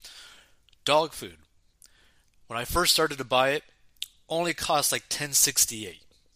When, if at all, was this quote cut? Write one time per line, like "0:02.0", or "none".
0:02.3